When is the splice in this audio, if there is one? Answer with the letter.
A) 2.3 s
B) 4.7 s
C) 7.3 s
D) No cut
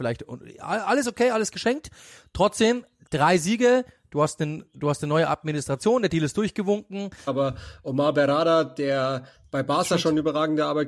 C